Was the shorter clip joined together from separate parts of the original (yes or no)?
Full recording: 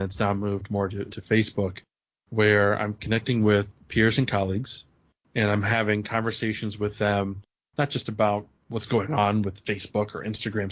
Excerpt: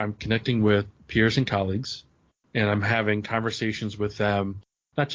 no